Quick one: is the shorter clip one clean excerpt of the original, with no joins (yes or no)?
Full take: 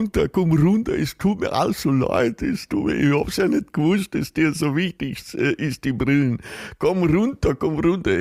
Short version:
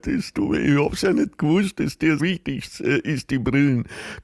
no